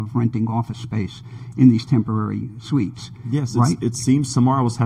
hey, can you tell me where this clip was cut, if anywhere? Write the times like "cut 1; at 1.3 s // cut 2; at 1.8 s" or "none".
none